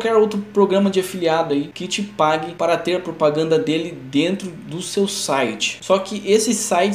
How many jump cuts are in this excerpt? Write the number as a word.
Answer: one